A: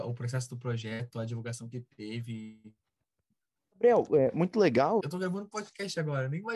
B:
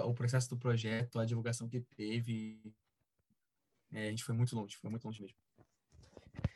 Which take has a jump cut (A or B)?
A